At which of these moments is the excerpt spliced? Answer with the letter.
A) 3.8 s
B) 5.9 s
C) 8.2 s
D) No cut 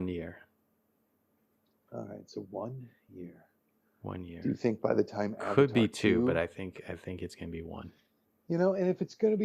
D